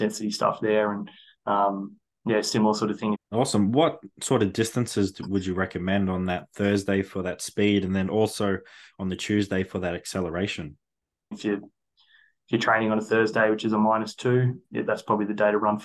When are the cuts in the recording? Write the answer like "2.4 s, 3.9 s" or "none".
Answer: 3.1 s, 11.3 s, 14.6 s